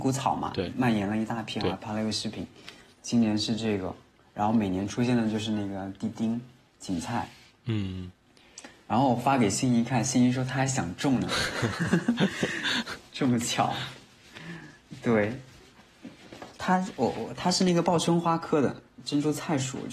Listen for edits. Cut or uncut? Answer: uncut